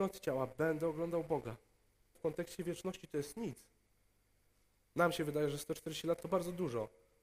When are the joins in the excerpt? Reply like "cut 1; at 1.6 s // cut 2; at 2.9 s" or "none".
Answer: cut 1; at 2.2 s